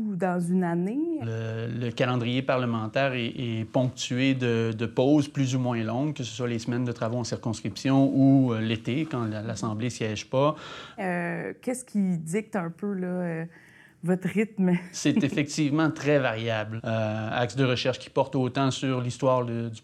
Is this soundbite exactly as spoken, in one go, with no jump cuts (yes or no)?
no